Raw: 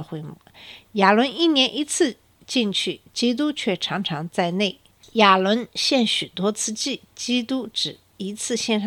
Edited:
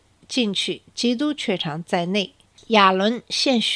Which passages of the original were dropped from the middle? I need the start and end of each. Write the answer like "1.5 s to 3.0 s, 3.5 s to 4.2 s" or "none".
3.8 s to 4.0 s